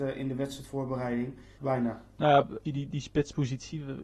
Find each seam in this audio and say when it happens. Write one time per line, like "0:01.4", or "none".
0:01.6
0:02.7